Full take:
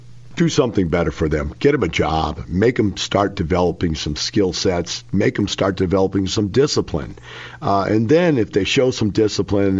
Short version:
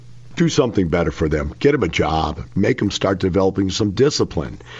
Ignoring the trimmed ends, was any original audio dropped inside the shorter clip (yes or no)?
yes